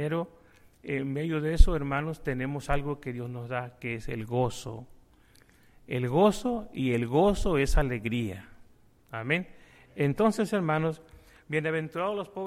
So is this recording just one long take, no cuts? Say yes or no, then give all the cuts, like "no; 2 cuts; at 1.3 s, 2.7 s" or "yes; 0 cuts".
yes; 0 cuts